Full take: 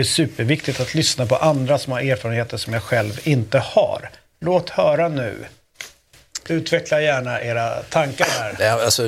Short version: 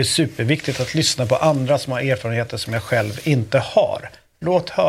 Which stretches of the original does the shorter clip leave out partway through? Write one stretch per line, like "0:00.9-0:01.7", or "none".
none

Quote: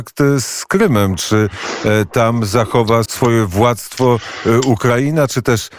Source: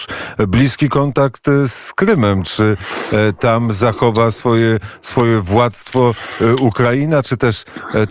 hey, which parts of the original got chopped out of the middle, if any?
0:04.3-0:05.0

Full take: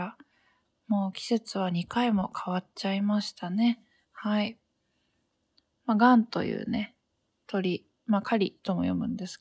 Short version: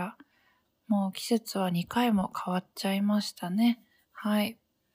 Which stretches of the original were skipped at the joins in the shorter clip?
none

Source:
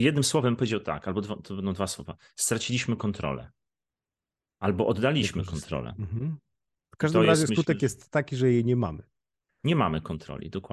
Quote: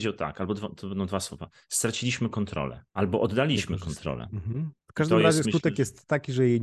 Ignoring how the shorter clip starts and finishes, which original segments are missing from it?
0:03.6-0:04.5
0:06.4-0:06.8

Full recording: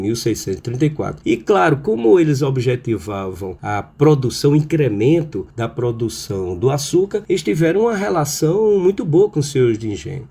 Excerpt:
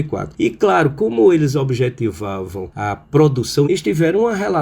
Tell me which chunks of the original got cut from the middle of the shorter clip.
0:04.5-0:07.3

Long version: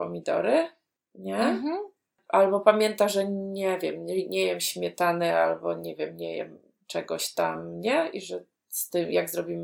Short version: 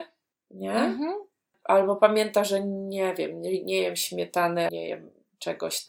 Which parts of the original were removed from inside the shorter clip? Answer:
0:05.3-0:06.2

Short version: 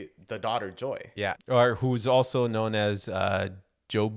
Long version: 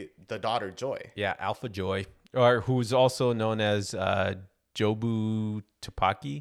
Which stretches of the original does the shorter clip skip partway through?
0:01.4-0:02.2

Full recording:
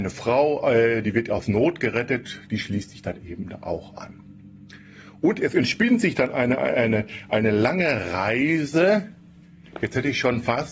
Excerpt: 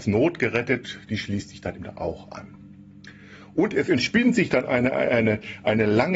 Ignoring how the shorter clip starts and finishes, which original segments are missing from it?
0:03.2-0:03.4

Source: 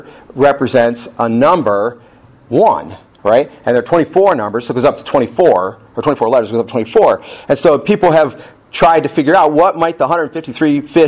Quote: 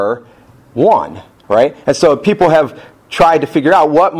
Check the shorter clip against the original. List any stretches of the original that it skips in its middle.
0:03.6-0:07.5

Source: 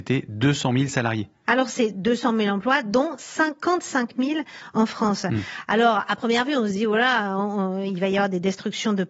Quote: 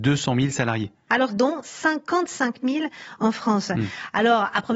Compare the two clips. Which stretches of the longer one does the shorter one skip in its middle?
0:01.7-0:02.8

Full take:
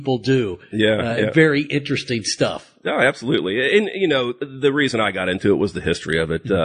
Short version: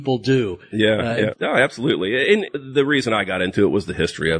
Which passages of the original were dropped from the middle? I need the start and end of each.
0:01.3-0:02.8
0:03.9-0:04.3

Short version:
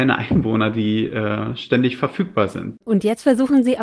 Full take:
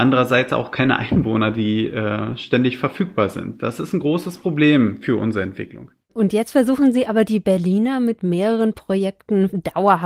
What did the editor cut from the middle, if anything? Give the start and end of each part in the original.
0:03.6-0:06.1

